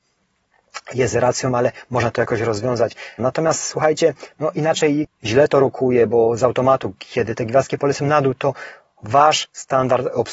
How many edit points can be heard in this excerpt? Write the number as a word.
two